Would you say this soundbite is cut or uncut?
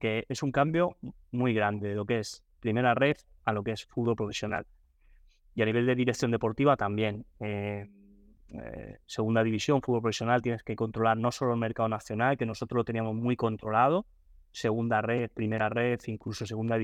uncut